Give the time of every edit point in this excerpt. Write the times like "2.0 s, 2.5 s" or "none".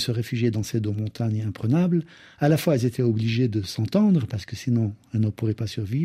none